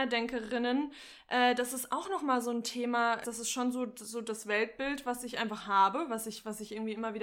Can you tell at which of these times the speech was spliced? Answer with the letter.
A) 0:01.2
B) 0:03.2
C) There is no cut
B